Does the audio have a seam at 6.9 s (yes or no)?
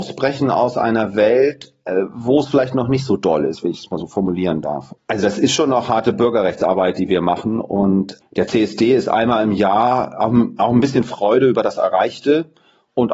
no